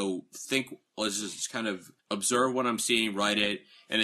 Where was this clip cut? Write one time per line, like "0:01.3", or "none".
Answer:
0:02.0